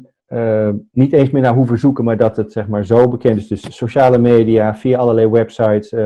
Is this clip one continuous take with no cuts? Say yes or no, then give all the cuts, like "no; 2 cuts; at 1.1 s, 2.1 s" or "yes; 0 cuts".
yes; 0 cuts